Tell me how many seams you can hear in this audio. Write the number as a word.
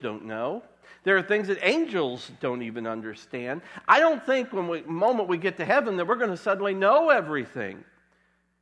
zero